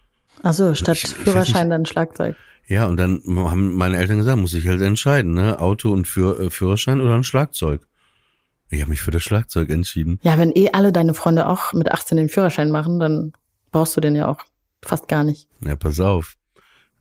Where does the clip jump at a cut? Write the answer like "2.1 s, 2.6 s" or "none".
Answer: none